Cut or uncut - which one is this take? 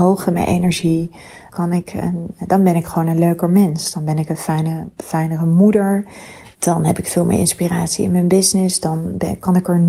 cut